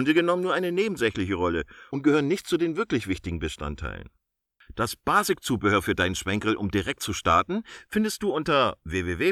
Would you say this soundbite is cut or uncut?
uncut